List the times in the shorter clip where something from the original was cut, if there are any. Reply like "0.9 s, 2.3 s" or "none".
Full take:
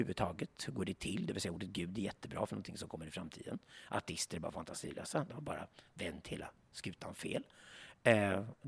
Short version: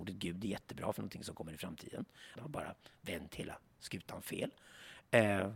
2.3 s